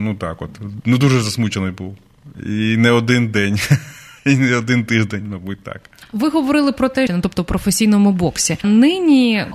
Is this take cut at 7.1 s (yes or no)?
yes